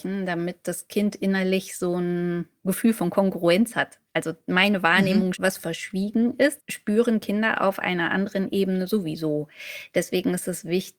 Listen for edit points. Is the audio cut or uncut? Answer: cut